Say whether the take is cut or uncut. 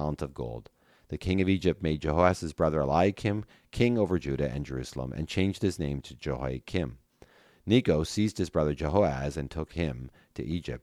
uncut